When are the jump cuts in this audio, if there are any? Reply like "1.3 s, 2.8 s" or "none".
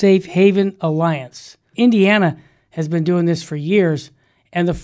1.7 s